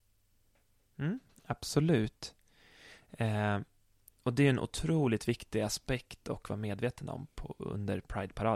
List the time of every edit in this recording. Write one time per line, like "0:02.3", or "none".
none